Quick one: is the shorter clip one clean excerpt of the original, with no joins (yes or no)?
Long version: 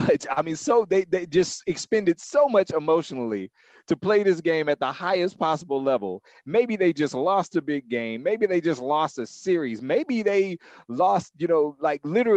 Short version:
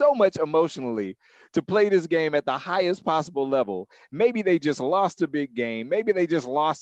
yes